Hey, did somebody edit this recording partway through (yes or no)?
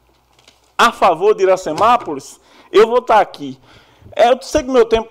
no